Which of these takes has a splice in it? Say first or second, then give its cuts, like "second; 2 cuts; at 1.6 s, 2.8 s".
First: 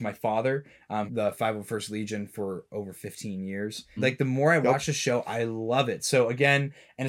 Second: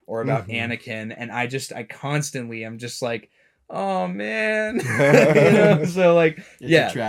first; 2 cuts; at 1.1 s, 4.0 s